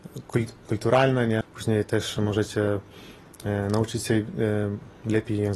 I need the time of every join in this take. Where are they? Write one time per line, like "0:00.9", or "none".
0:01.4